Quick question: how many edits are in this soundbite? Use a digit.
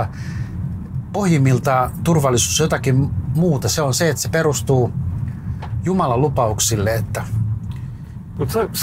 0